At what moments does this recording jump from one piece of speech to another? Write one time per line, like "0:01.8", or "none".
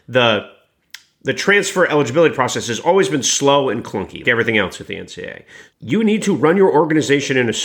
0:04.2
0:05.7